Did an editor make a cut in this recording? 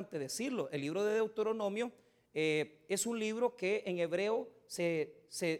no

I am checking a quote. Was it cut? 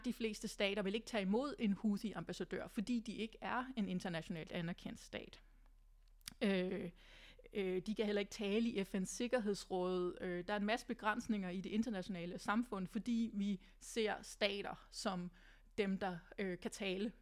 no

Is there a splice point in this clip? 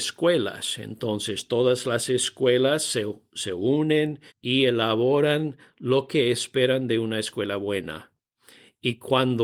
yes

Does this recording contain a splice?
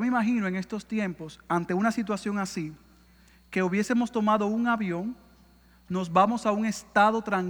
no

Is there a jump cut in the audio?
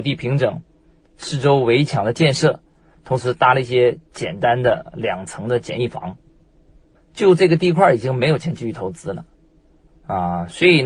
yes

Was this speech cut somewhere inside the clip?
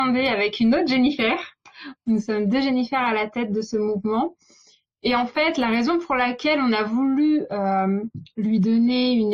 no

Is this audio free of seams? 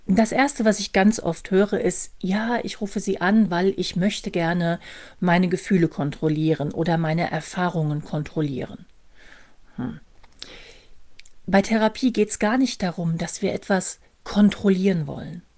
yes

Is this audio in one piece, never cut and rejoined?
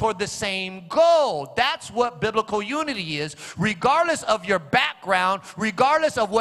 yes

